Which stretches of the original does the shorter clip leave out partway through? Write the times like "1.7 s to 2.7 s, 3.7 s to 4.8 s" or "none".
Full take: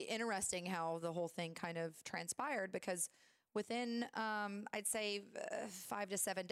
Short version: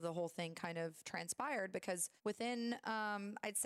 3.2 s to 3.5 s